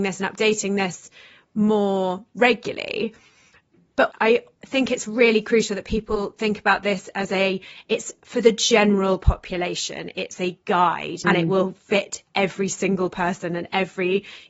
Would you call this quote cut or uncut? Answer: cut